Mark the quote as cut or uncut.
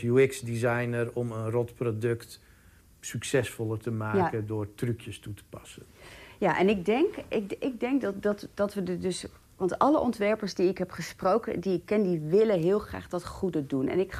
uncut